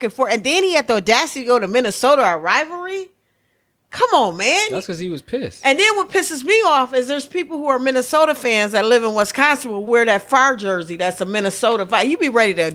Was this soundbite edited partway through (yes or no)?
yes